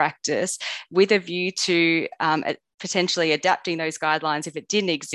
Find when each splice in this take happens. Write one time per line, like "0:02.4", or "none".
none